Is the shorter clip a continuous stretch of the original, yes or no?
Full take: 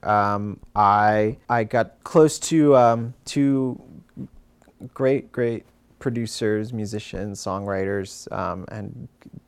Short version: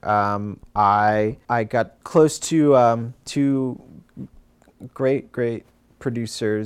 yes